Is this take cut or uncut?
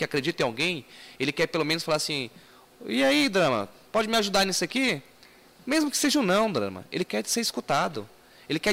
uncut